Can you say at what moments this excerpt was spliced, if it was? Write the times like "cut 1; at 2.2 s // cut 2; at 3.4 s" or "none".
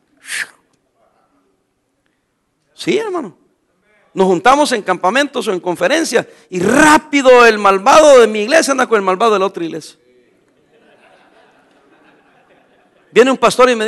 none